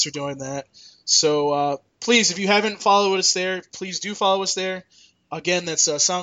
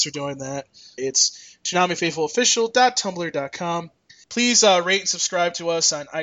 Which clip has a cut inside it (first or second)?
second